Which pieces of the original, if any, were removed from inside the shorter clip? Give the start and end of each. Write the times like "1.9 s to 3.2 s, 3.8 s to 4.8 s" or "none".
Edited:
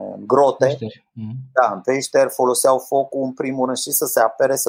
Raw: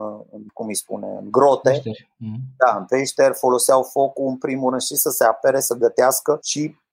none